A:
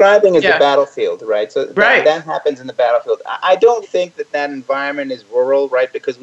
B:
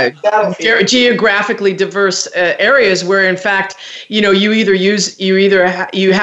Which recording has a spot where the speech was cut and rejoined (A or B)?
A